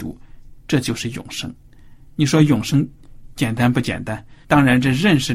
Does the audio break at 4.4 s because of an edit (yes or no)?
yes